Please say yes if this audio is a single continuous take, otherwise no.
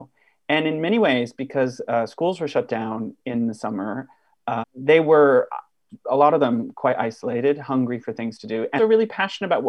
no